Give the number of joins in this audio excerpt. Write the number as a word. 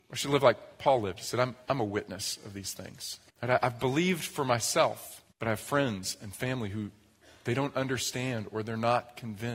two